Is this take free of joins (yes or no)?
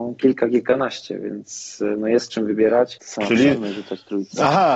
no